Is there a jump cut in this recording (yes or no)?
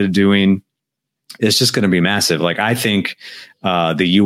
no